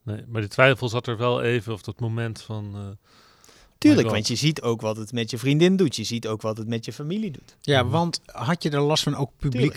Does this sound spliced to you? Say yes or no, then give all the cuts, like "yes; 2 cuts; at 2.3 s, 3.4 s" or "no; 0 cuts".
no; 0 cuts